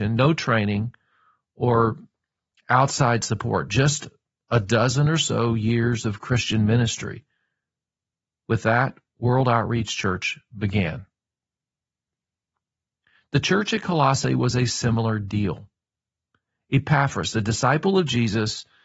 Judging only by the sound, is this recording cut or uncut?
uncut